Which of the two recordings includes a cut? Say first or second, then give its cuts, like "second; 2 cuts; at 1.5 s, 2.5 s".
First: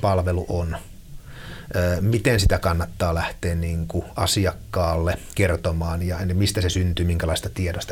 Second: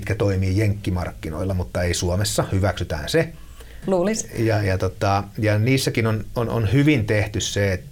second; 1 cut; at 3.8 s